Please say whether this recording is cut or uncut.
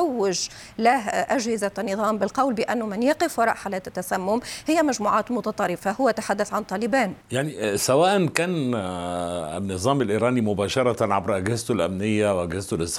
cut